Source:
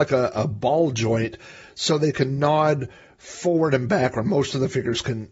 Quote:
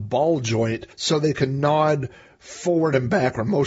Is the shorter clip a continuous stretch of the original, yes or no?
no